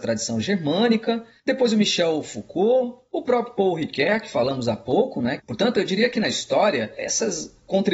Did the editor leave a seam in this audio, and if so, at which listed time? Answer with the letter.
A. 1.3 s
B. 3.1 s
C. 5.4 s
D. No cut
C